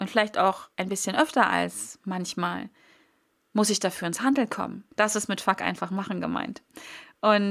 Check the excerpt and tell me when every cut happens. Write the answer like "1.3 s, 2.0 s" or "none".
4.9 s